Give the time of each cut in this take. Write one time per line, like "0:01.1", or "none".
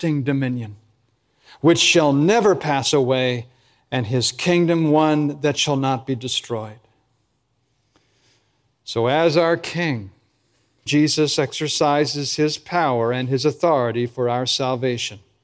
0:10.9